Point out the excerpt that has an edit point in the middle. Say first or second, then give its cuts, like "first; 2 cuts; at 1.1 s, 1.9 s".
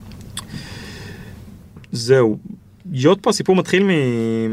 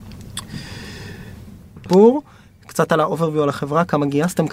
second; 1 cut; at 1.9 s